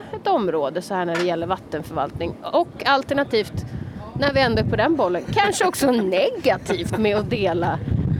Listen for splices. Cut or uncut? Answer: uncut